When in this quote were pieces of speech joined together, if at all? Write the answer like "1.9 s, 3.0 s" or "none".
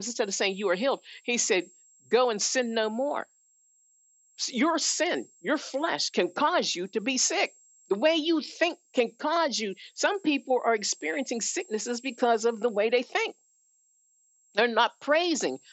none